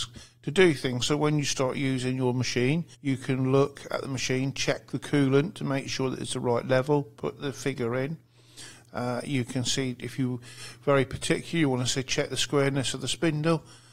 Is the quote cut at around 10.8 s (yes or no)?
no